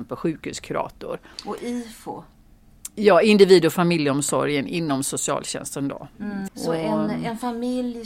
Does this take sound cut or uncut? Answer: cut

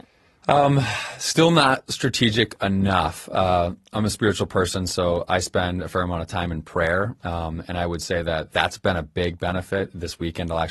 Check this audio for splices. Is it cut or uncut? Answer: uncut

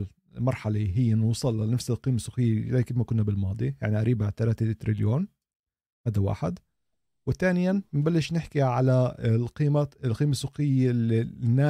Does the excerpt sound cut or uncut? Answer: uncut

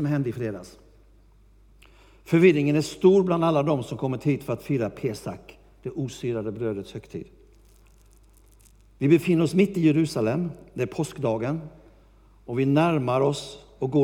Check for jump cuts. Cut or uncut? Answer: uncut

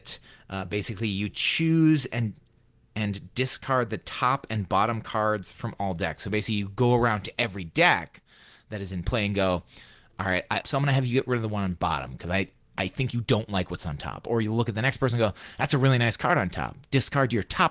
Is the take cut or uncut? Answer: cut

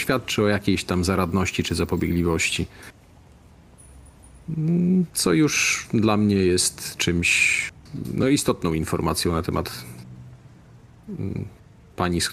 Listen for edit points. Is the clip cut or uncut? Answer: uncut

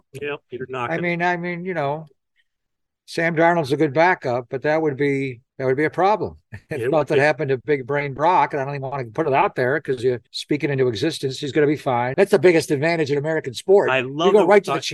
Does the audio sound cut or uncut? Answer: cut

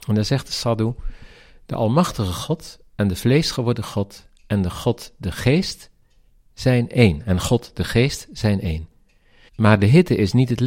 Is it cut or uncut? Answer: cut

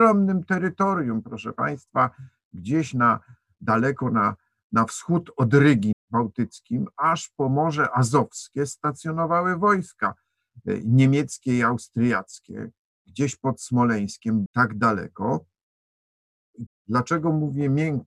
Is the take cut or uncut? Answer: cut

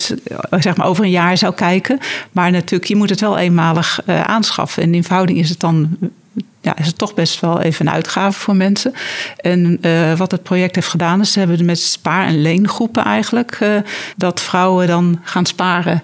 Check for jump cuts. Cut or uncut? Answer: cut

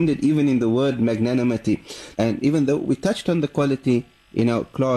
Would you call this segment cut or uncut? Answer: cut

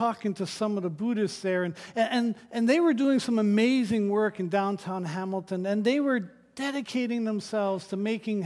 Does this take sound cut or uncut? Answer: uncut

